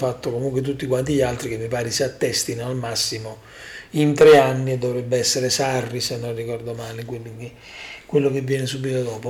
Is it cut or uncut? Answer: uncut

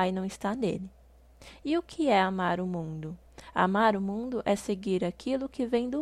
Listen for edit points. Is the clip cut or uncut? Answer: uncut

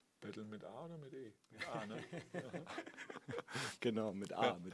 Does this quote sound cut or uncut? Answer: uncut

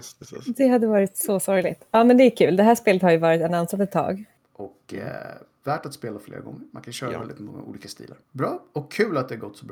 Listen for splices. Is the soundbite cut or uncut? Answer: cut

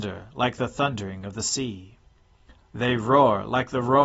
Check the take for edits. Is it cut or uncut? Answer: cut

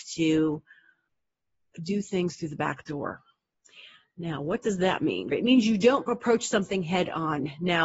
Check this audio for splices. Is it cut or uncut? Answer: cut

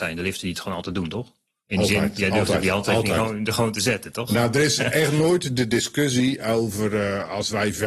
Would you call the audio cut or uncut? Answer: uncut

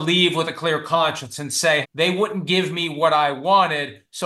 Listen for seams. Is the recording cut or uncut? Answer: cut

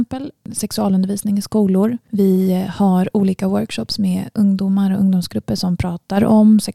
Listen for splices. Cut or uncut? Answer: uncut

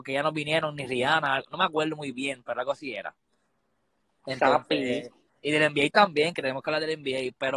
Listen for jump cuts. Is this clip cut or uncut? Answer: cut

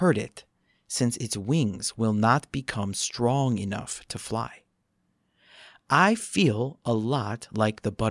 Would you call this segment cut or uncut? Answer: uncut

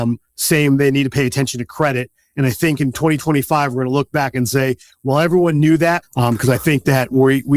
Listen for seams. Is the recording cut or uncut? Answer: cut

